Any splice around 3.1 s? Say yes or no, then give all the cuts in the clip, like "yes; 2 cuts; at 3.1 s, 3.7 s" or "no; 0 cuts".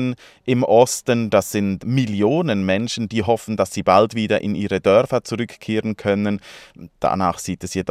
no; 0 cuts